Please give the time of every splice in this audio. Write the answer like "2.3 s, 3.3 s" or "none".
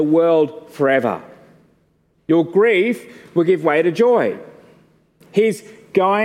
2.2 s